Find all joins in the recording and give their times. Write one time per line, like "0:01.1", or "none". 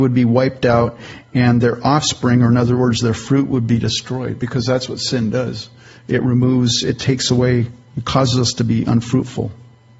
none